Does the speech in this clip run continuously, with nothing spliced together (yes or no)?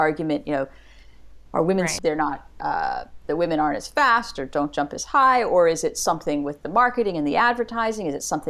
no